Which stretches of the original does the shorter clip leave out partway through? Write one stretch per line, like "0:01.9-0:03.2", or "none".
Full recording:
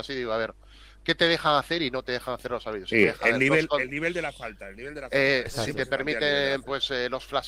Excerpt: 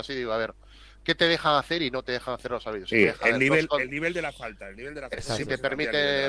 0:05.1-0:05.4